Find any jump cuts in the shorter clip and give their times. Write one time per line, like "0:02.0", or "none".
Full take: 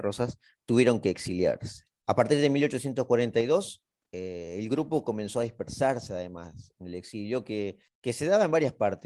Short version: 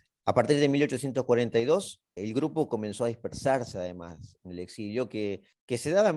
0:02.2